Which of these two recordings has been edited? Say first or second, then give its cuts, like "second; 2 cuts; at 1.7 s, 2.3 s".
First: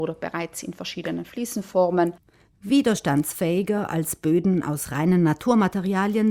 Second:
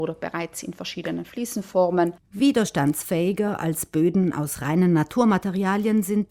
second; 1 cut; at 2.2 s